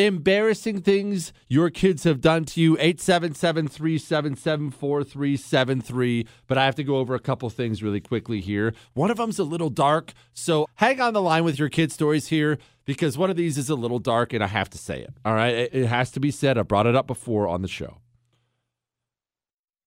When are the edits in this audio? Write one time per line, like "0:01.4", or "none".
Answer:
0:10.7
0:15.7

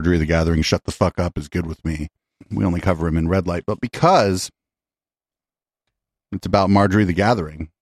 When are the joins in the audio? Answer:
0:02.4

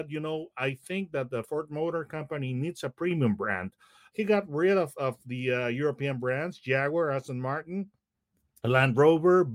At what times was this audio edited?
0:04.1

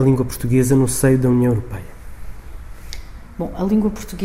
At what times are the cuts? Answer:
none

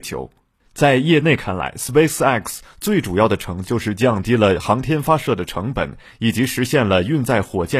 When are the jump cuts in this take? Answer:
0:03.6

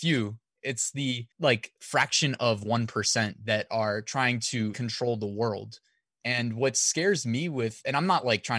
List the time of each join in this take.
0:01.3
0:04.7

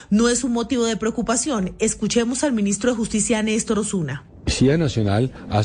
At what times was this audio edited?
none

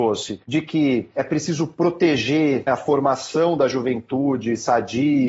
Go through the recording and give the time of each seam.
0:02.7

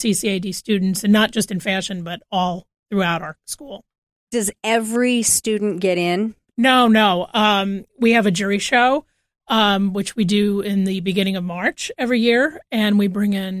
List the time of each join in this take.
none

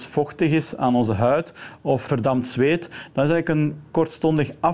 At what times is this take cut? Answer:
0:02.1

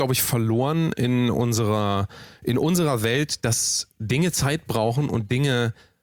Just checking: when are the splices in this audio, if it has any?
none

